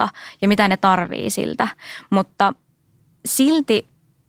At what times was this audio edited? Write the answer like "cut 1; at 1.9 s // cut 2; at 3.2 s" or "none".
none